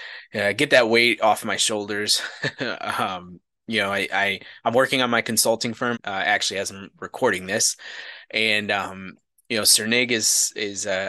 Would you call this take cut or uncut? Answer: cut